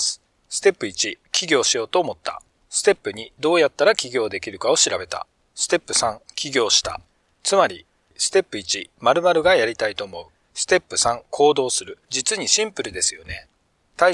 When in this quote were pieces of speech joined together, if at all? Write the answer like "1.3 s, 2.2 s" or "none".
10.4 s, 12.0 s